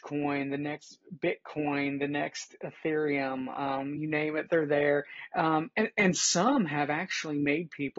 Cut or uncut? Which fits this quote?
uncut